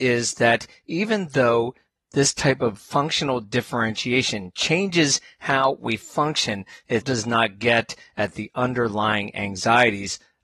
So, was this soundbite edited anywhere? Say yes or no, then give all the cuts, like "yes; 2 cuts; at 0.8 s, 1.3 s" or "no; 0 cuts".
yes; 1 cut; at 7.0 s